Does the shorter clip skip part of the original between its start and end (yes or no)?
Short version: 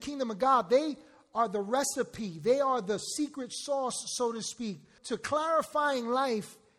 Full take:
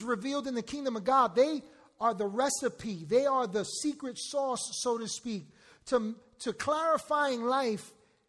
yes